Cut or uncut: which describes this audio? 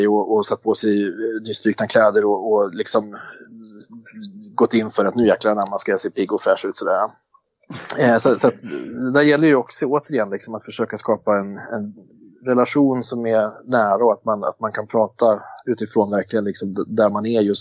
uncut